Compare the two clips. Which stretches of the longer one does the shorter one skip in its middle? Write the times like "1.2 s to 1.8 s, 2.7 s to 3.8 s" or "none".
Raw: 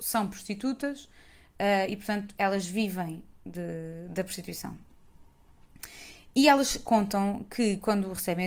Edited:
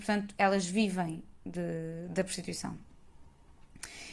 none